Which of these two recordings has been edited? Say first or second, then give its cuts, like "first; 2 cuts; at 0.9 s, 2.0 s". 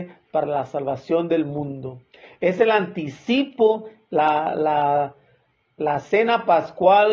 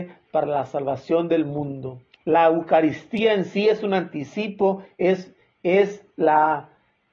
second; 1 cut; at 2.1 s